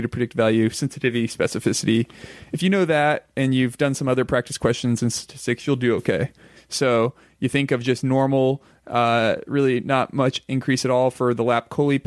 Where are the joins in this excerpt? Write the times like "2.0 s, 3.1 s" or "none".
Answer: 6.6 s

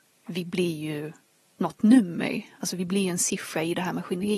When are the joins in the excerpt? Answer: none

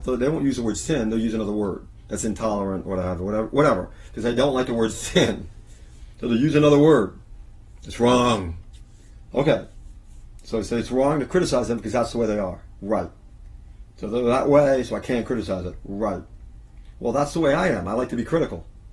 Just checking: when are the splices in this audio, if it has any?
none

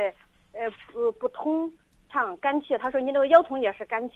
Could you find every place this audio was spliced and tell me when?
1.1 s

